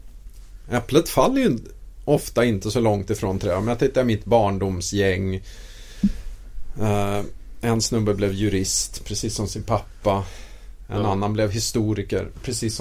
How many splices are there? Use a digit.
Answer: 0